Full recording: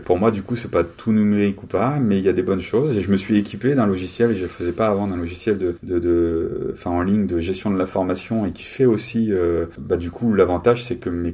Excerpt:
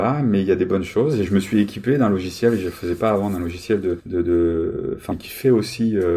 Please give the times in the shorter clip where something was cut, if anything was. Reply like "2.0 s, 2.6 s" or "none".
5.1 s